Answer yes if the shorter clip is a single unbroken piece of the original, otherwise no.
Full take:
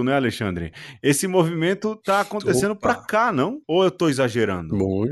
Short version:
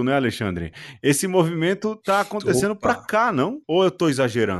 yes